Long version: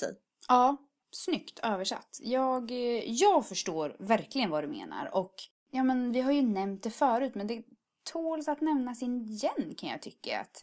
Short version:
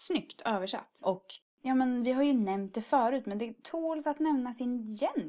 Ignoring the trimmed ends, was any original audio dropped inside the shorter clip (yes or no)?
yes